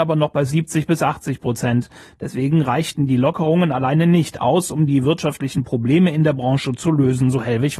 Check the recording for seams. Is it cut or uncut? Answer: uncut